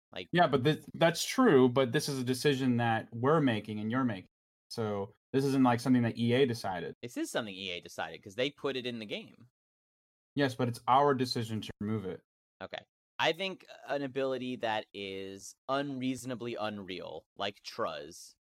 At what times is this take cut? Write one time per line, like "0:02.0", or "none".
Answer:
0:07.0